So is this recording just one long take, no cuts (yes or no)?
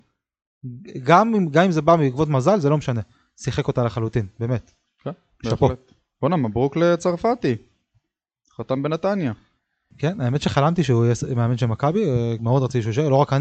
no